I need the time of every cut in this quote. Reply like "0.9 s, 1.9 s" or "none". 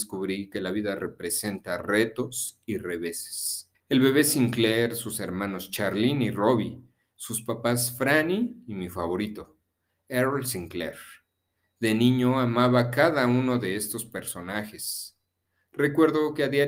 3.7 s